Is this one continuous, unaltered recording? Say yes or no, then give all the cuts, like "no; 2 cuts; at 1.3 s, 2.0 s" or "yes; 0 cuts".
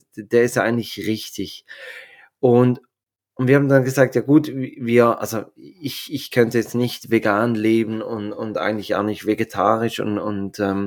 yes; 0 cuts